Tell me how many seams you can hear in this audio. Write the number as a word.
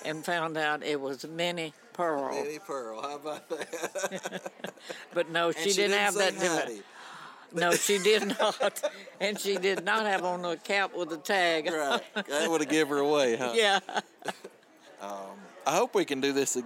one